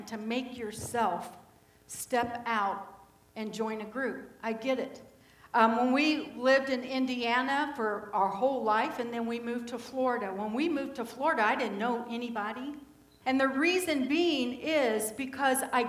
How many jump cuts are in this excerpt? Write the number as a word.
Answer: one